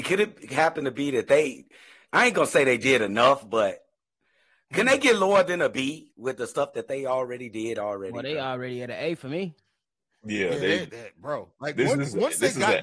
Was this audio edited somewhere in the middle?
no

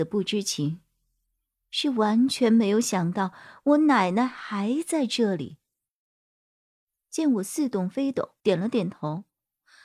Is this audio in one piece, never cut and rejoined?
no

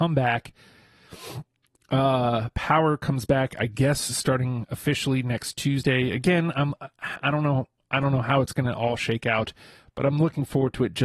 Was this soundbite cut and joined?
no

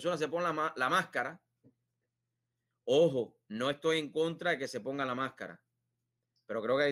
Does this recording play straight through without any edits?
yes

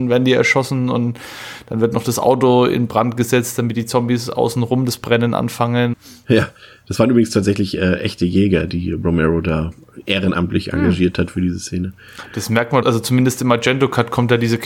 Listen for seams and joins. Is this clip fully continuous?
no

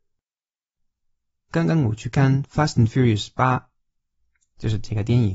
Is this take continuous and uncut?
yes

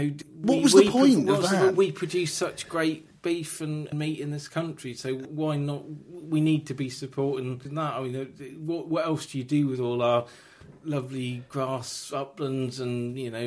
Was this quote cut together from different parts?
no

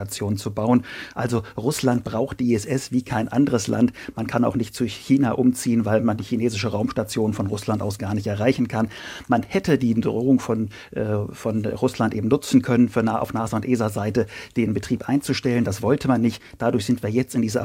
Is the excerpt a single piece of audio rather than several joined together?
no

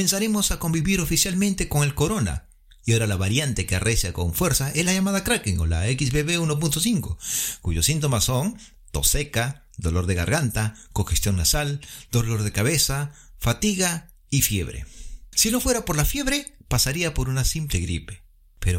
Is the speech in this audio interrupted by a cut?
no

